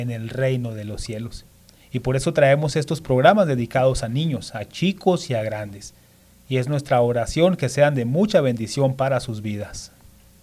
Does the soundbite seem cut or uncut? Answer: uncut